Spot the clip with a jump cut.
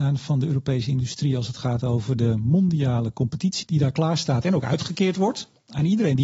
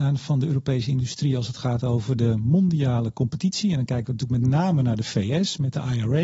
first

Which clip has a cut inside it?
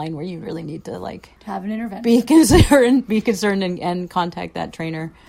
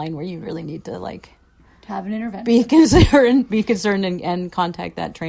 first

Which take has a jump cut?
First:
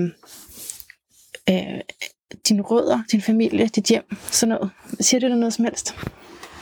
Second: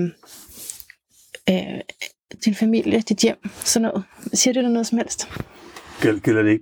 second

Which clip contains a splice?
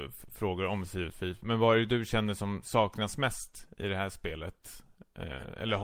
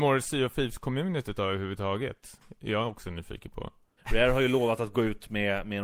second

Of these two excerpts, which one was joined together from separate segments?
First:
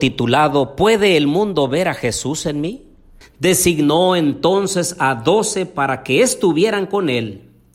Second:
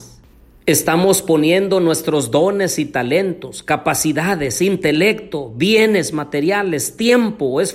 first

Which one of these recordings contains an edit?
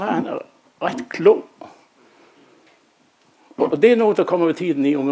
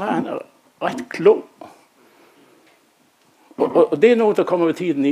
first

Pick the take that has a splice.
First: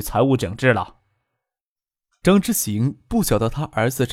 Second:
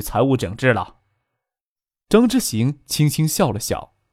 second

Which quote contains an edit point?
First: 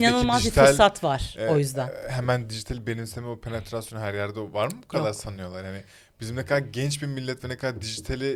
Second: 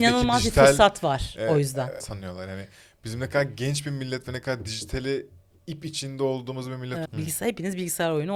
second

